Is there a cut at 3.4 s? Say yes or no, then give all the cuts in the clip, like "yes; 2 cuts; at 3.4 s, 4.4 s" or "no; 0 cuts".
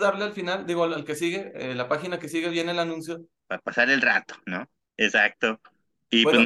yes; 2 cuts; at 3.4 s, 4.9 s